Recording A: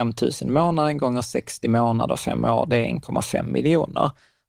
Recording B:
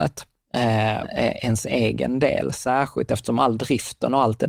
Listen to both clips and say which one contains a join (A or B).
B